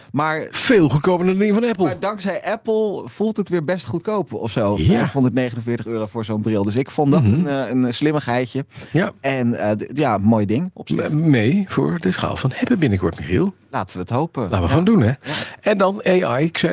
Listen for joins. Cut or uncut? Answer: uncut